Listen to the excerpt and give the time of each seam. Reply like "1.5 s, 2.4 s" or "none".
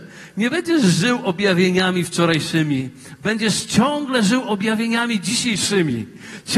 none